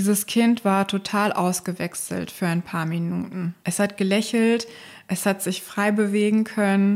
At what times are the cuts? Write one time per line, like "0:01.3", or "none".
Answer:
none